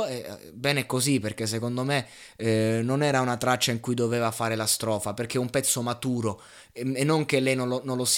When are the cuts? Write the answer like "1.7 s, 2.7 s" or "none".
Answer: none